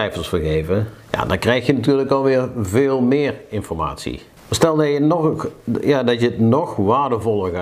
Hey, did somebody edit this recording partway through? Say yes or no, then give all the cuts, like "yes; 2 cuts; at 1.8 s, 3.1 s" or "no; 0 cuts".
yes; 1 cut; at 4.4 s